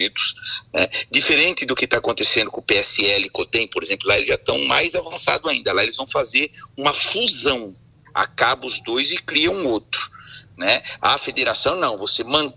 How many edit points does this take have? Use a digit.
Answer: 0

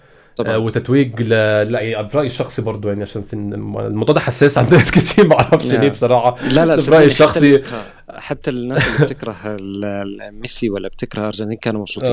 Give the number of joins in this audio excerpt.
0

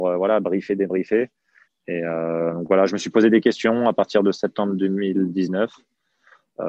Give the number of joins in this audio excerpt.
2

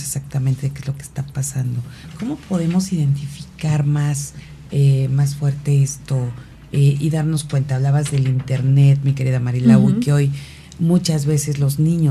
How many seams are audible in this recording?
0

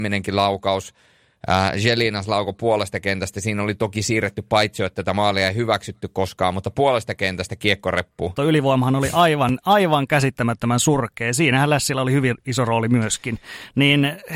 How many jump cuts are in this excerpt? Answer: 1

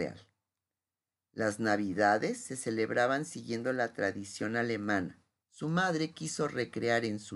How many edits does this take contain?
1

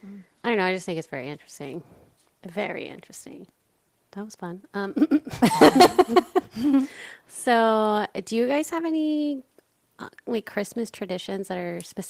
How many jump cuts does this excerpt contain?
0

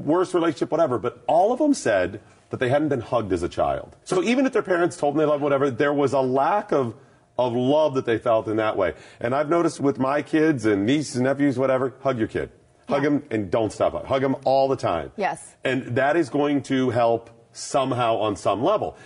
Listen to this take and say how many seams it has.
2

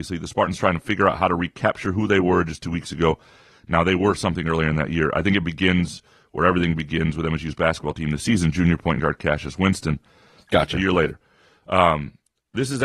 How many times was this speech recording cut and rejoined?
1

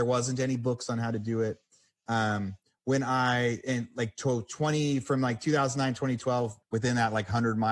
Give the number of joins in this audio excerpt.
1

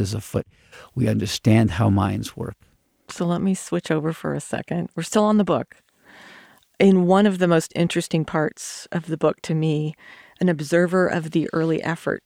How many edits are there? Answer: 0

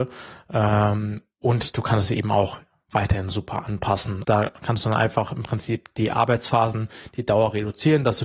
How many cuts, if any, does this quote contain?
1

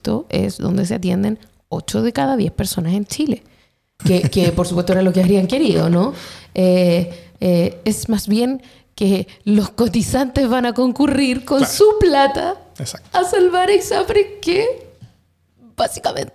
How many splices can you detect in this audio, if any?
1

